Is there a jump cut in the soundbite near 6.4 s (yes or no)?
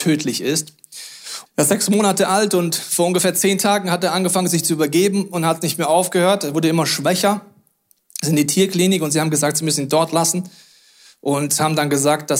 no